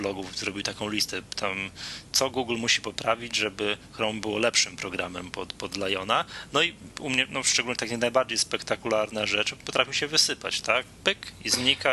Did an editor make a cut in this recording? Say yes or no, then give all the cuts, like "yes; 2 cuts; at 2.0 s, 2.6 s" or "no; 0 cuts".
no; 0 cuts